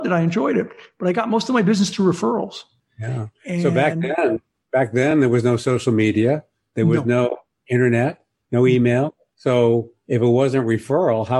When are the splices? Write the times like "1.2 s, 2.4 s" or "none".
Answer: none